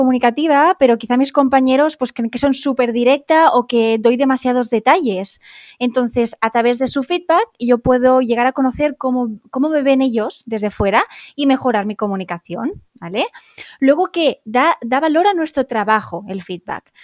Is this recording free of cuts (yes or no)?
yes